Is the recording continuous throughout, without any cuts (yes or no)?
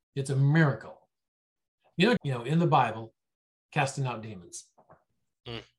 no